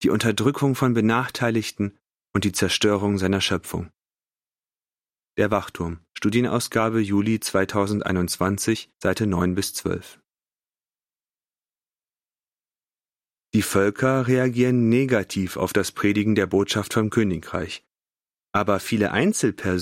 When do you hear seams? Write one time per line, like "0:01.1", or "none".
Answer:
0:13.4